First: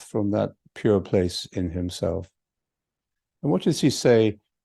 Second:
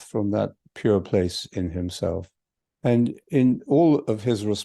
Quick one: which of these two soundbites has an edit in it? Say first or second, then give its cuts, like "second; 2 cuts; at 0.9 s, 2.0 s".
second; 1 cut; at 2.7 s